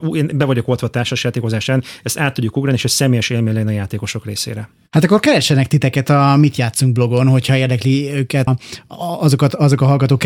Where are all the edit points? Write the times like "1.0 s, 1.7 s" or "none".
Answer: 8.5 s